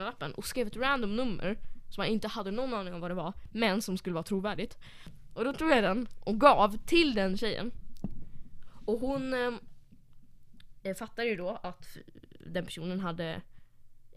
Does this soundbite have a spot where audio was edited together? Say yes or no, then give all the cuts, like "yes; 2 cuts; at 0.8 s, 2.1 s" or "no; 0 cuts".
no; 0 cuts